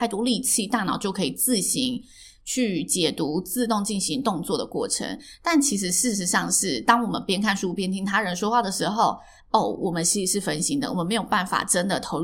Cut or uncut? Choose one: uncut